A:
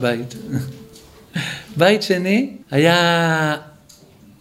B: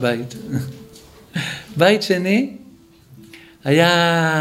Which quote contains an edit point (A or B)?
A